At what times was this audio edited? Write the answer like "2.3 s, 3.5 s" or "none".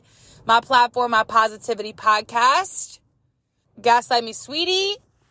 3.6 s